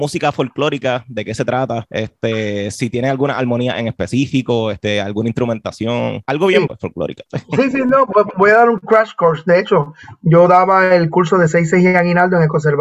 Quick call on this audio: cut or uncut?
cut